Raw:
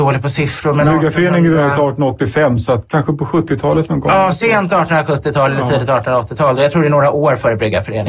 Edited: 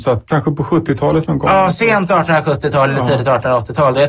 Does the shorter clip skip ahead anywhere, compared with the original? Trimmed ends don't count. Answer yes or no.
no